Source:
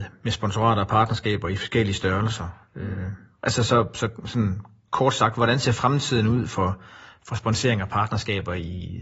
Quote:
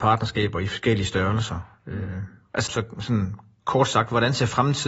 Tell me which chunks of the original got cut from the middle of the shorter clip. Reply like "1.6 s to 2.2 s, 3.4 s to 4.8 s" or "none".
3.6 s to 3.9 s